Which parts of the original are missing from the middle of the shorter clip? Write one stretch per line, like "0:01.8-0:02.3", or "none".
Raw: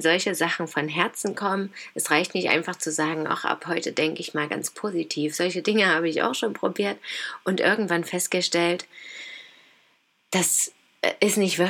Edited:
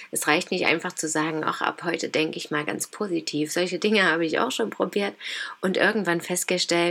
none